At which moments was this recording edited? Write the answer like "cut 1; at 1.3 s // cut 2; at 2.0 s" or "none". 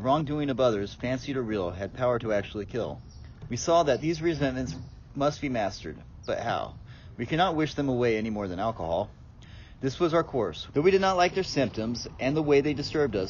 cut 1; at 3.5 s // cut 2; at 10.7 s